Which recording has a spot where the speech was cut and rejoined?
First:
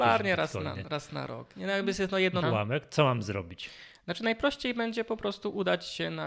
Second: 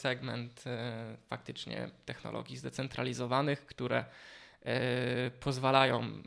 first; 1 cut; at 2.4 s

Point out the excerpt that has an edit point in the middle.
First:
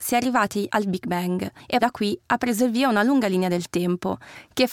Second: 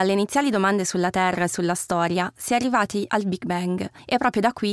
first; 1 cut; at 1.8 s

